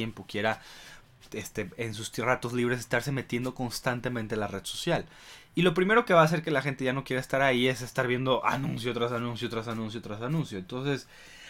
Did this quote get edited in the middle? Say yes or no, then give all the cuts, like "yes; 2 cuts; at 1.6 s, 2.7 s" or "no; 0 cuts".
no; 0 cuts